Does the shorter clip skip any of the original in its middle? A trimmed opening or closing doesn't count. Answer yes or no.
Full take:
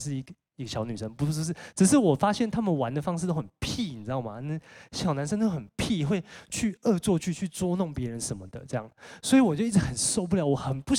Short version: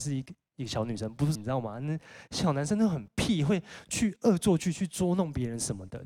yes